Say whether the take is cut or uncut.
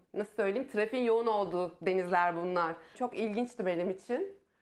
cut